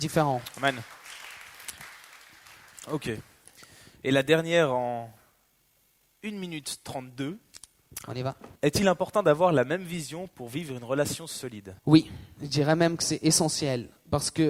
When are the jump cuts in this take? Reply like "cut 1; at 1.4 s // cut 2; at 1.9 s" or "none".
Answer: cut 1; at 8.5 s // cut 2; at 11.8 s